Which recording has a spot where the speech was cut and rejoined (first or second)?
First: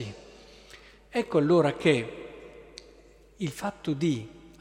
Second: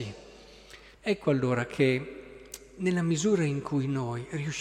second